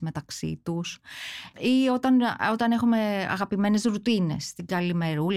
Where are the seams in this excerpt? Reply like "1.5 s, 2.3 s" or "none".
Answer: none